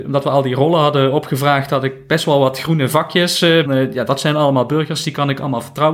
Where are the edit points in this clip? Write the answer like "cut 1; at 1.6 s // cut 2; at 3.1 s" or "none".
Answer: cut 1; at 3.6 s